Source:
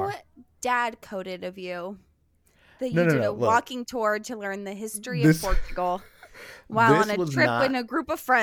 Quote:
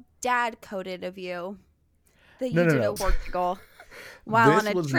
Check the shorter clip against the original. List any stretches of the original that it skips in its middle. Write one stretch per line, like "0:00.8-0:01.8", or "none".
0:03.4-0:05.4